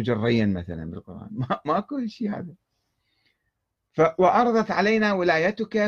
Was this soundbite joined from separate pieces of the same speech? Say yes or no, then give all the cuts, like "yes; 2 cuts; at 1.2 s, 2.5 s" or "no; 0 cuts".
no; 0 cuts